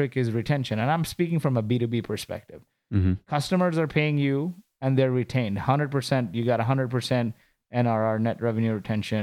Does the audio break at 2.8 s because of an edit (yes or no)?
no